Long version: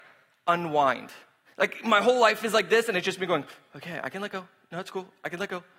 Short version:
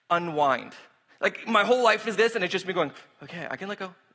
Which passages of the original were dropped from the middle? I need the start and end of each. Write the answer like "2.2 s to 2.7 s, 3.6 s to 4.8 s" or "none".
2.5 s to 2.7 s